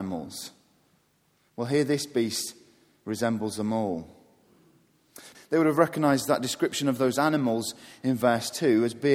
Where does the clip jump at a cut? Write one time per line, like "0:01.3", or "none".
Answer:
0:05.3

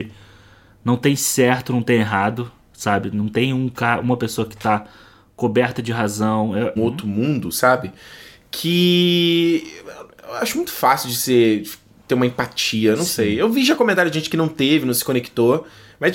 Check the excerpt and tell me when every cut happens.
0:06.8

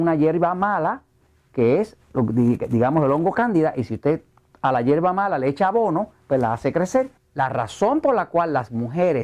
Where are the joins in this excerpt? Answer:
0:07.2

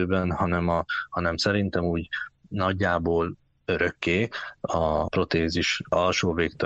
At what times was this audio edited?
0:04.6

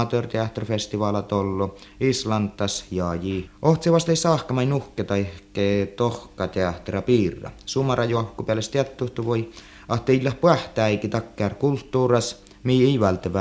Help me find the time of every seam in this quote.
0:03.5

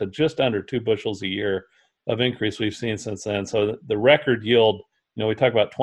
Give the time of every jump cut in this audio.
0:03.8

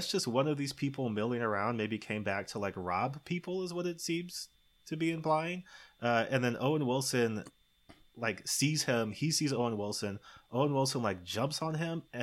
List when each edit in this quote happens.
none

